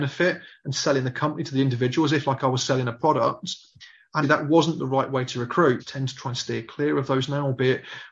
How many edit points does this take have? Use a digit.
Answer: 2